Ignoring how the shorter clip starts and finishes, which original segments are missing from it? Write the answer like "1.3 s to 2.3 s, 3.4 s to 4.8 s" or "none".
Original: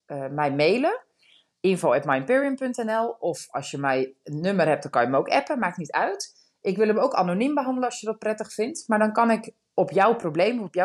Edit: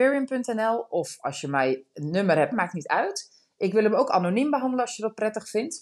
4.8 s to 5.6 s